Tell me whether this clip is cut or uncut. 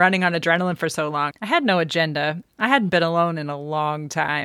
cut